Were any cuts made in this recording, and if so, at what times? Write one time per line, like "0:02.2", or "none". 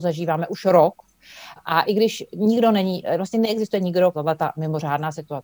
0:01.6
0:04.1